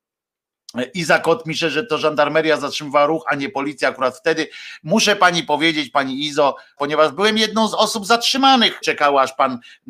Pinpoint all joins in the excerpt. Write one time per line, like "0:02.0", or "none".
0:06.8
0:08.8